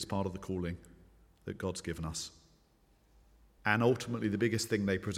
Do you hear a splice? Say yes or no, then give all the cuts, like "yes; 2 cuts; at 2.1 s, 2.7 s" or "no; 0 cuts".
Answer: yes; 1 cut; at 3.6 s